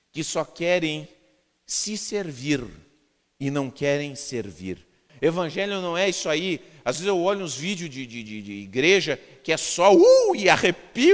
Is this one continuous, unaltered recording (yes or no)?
no